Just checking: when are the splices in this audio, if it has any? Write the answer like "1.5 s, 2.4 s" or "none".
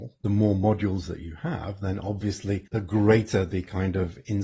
2.7 s